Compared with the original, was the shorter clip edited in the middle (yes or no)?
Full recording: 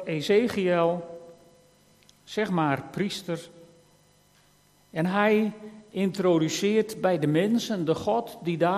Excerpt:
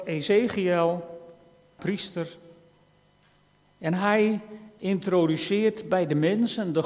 yes